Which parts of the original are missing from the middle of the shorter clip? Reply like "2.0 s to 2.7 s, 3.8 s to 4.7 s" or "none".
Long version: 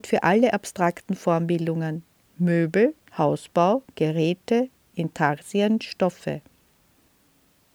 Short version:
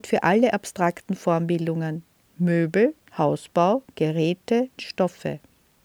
4.8 s to 5.8 s